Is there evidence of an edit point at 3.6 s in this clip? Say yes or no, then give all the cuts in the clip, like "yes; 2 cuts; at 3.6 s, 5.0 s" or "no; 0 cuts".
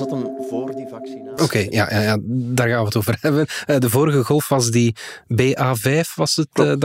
no; 1 cut; at 1.4 s